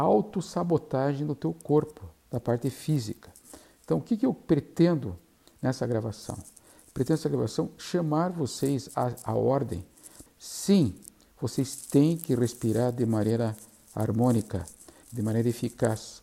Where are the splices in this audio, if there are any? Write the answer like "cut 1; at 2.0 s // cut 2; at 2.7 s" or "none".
cut 1; at 10.3 s // cut 2; at 15.0 s